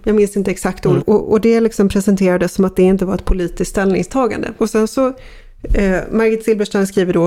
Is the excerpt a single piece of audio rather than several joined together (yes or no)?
no